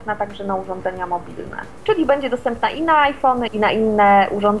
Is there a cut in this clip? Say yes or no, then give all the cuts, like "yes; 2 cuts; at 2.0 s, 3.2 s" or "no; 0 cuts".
yes; 2 cuts; at 1.8 s, 3.5 s